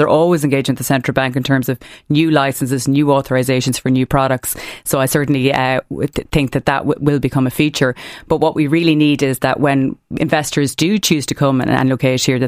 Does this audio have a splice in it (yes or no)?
no